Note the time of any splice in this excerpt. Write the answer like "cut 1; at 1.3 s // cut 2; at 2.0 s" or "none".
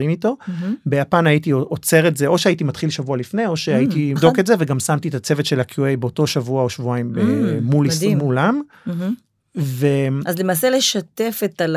cut 1; at 4.2 s